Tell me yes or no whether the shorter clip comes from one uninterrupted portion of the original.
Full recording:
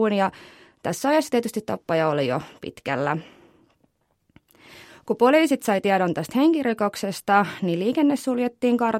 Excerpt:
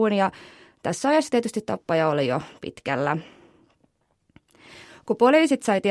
yes